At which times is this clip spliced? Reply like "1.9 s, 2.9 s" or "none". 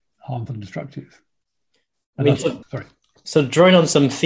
2.6 s